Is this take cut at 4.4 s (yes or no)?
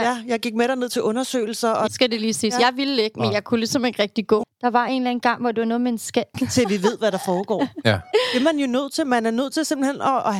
yes